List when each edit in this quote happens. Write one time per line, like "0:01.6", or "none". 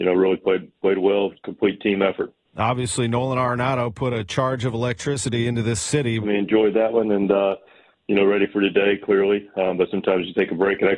0:06.2